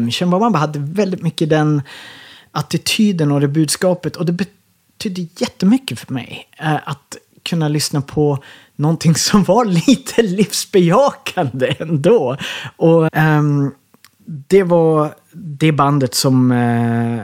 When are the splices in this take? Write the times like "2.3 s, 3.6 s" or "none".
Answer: 13.1 s